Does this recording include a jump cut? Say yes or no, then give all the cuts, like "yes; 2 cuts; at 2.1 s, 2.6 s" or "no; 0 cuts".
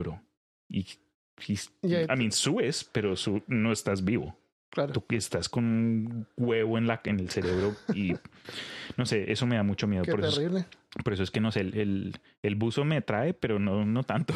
no; 0 cuts